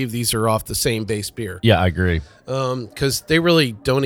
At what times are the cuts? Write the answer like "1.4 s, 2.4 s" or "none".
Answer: none

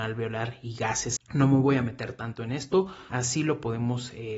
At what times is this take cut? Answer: 1.2 s, 3.1 s

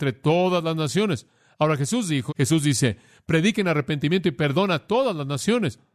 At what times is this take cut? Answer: 2.3 s

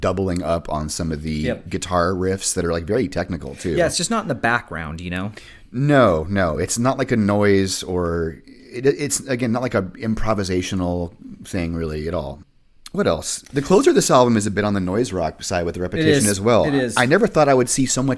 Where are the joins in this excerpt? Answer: none

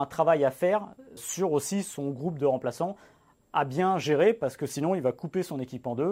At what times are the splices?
1.2 s

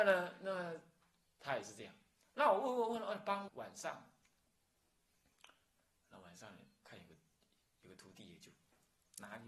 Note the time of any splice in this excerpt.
3.5 s

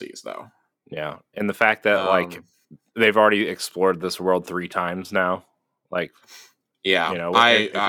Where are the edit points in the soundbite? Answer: none

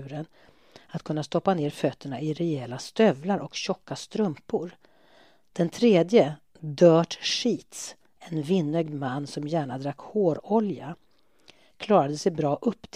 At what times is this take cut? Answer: none

